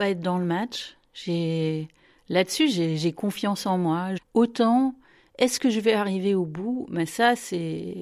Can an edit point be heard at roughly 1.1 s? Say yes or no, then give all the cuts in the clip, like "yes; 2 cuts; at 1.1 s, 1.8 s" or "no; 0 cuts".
no; 1 cut; at 4.2 s